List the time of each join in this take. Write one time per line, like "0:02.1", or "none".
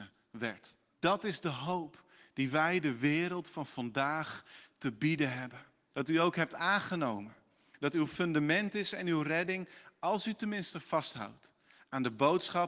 0:00.9
0:05.9